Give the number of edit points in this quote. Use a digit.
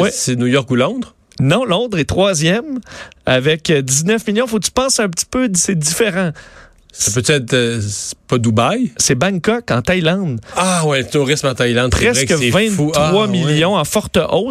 0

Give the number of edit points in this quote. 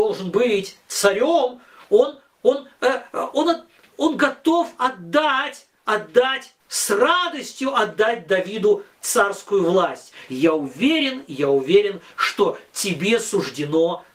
2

